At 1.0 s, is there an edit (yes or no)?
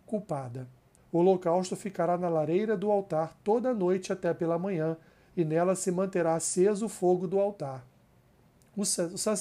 yes